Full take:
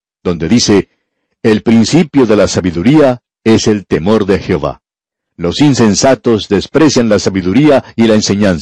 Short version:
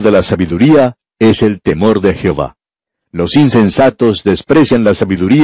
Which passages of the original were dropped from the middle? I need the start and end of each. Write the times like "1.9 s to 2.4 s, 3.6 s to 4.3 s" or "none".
none